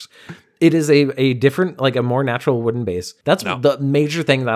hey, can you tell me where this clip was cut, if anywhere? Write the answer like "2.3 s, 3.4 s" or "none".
3.2 s